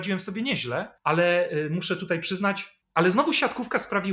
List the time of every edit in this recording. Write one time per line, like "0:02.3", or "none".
0:01.0
0:02.8